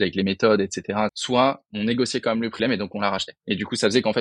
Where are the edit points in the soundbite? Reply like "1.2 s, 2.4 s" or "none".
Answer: 1.1 s, 2.6 s